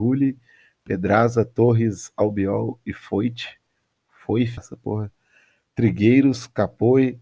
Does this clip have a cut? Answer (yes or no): yes